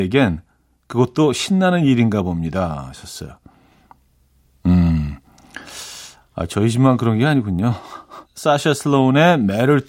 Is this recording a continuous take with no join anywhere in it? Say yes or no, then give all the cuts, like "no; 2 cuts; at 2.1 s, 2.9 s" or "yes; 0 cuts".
no; 1 cut; at 8.2 s